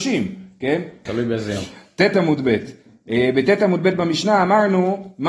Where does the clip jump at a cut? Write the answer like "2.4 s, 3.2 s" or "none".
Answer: 1.1 s